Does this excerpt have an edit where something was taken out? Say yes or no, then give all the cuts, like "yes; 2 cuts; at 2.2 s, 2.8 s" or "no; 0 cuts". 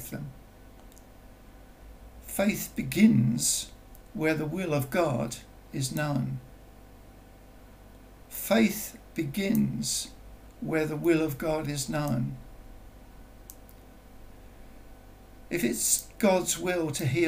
yes; 1 cut; at 8.2 s